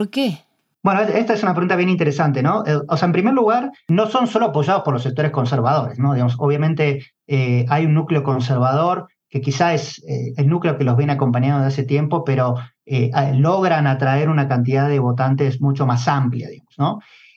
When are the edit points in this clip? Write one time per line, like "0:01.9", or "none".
none